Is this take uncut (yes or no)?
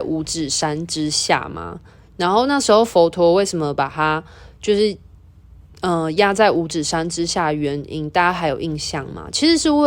yes